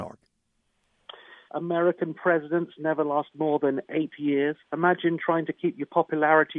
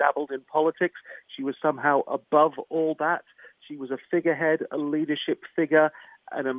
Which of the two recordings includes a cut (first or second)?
first